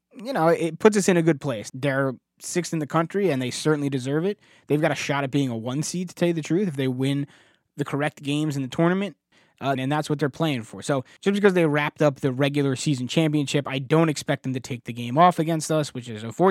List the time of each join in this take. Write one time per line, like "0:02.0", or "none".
0:01.7
0:09.8